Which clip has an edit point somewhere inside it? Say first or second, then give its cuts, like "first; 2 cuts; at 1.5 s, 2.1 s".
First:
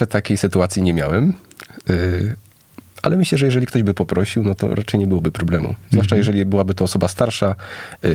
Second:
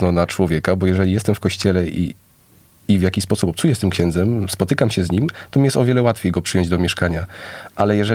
first; 1 cut; at 4.6 s